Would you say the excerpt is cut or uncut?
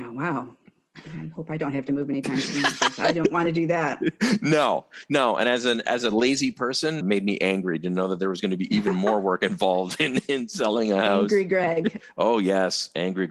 cut